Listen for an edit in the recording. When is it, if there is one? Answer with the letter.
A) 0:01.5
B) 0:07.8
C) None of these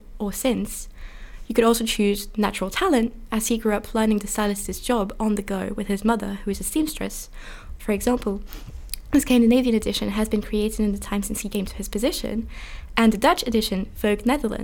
B